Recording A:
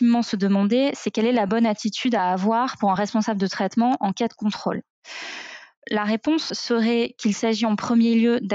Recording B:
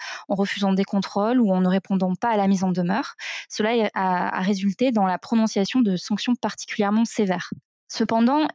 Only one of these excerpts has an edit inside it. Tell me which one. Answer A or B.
A